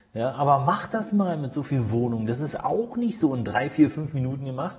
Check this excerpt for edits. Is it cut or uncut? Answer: uncut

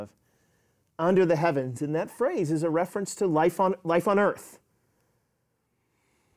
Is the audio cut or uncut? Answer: uncut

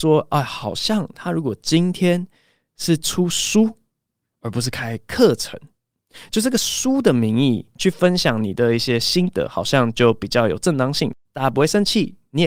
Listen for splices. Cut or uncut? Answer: uncut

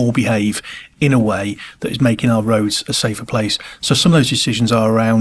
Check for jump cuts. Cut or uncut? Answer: uncut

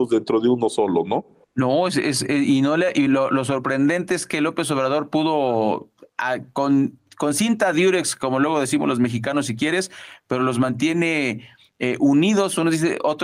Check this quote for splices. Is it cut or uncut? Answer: uncut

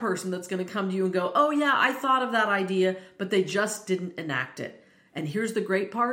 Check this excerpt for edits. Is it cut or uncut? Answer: uncut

